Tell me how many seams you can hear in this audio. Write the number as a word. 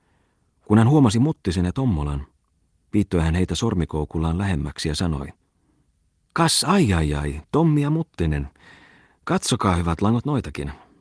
zero